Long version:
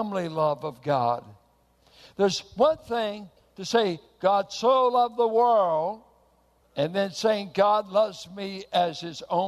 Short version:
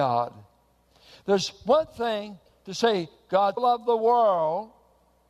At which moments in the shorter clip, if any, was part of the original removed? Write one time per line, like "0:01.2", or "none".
0:03.6